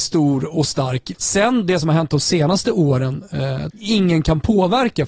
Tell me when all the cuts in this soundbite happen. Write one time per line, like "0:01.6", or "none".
0:01.1
0:03.7

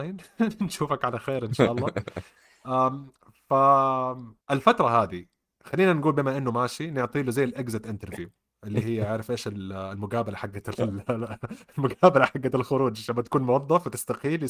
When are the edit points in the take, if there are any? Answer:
0:04.4

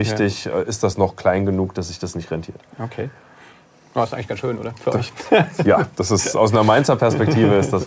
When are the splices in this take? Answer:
none

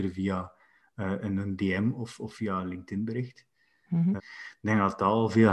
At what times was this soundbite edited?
0:04.2

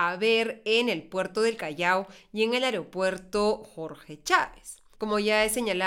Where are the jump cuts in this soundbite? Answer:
0:04.9

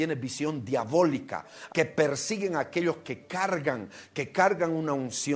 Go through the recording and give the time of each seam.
0:01.7

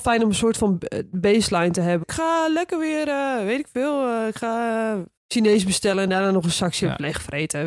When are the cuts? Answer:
0:02.0
0:05.2

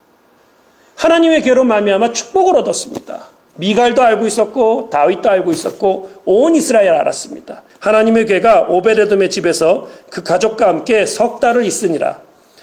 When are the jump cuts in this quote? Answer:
0:03.5
0:07.7

